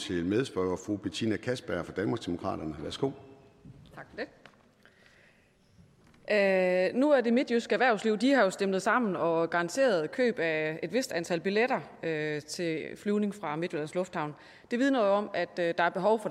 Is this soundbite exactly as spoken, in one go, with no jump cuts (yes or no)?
yes